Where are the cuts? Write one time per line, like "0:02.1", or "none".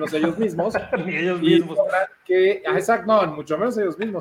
none